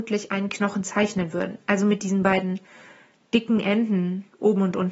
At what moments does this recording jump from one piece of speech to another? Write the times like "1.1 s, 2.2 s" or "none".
none